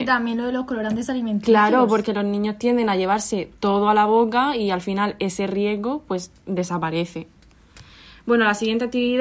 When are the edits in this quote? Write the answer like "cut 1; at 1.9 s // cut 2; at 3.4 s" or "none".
none

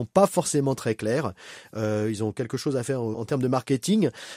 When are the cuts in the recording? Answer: cut 1; at 3.1 s

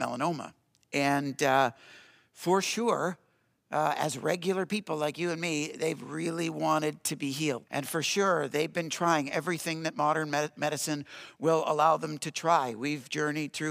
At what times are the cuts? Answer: cut 1; at 7.7 s

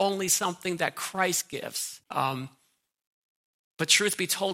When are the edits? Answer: cut 1; at 2.0 s

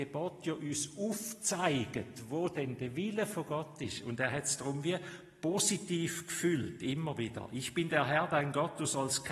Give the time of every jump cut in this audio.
none

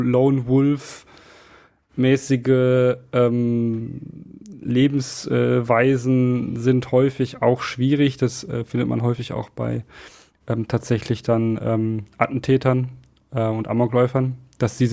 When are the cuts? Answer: none

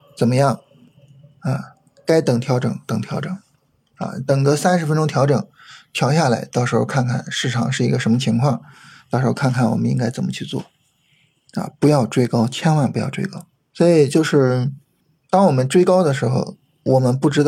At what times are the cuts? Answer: none

